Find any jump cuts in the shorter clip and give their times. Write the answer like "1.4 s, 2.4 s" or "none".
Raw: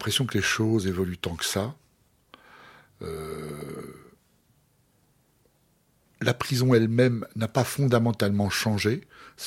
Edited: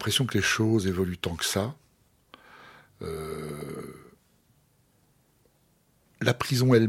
none